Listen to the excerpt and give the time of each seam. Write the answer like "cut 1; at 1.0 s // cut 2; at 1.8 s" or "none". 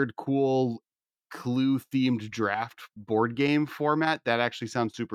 none